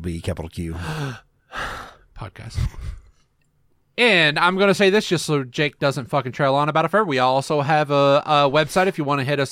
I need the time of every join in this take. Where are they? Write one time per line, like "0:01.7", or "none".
none